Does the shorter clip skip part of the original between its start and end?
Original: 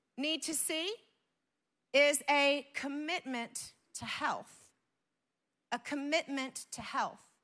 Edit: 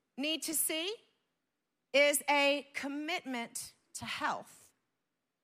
no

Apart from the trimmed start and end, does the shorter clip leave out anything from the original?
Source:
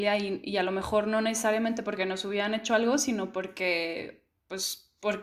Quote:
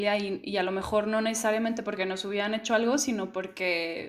no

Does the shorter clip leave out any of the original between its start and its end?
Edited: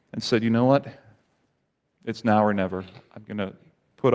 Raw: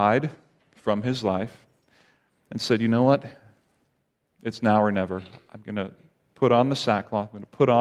no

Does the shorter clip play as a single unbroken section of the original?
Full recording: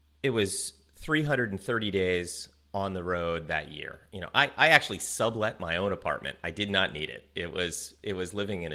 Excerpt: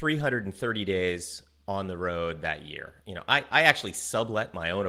yes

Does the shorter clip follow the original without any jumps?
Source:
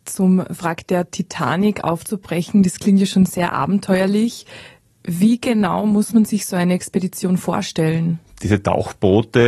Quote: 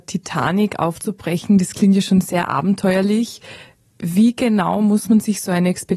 yes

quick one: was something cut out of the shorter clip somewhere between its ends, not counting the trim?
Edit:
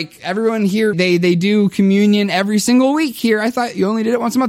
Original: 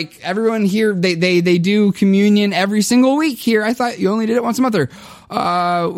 yes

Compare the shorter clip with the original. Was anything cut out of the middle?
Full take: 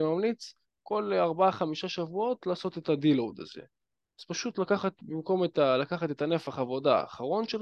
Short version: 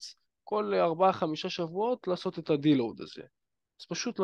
no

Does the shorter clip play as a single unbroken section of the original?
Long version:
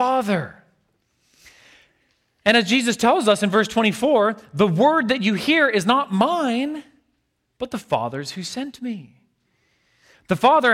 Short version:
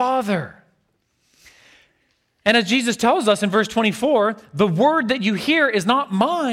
yes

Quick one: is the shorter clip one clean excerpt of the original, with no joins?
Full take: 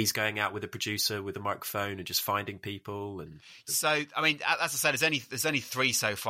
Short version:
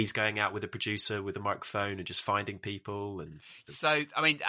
yes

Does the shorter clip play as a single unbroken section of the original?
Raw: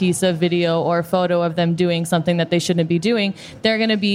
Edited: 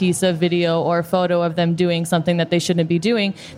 yes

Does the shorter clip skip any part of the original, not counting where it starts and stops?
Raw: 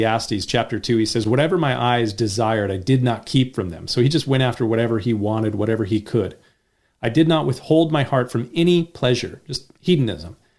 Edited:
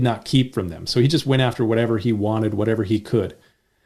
no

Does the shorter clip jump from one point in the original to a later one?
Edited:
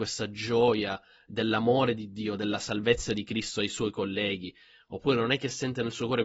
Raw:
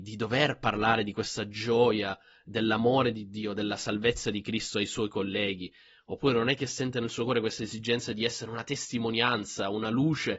no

